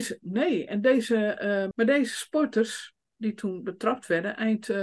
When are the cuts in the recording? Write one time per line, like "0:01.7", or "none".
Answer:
0:01.7